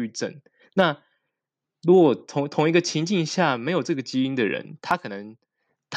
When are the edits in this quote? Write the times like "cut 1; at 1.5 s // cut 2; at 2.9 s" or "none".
none